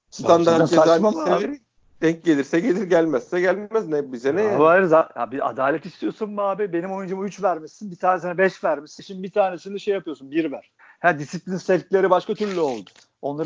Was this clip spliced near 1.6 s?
no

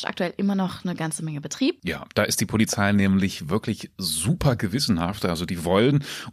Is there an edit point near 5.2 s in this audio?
no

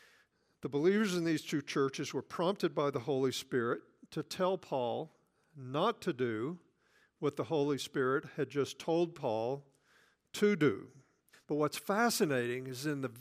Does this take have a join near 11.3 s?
yes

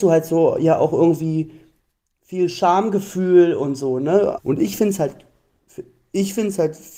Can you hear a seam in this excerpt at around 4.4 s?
yes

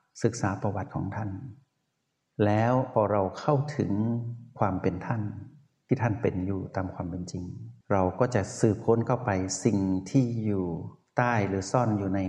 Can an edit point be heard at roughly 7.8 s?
yes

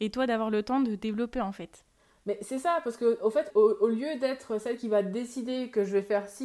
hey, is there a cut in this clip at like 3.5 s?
yes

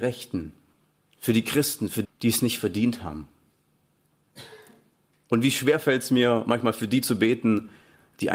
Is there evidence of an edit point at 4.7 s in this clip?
no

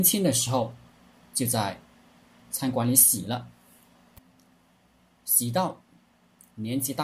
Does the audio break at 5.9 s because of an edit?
no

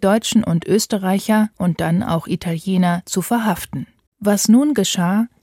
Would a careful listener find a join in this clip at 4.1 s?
yes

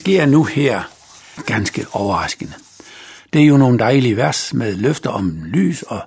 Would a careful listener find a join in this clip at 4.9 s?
no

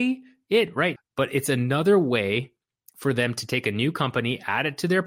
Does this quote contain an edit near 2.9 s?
no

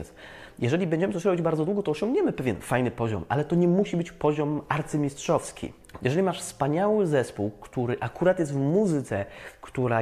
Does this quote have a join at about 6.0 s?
yes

